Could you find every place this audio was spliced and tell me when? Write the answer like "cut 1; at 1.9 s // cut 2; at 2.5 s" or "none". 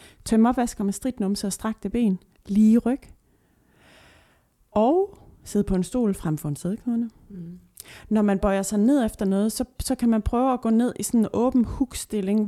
none